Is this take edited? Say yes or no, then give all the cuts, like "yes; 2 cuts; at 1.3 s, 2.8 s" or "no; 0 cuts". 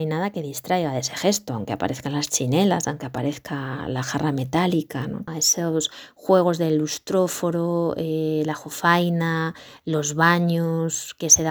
yes; 1 cut; at 5.3 s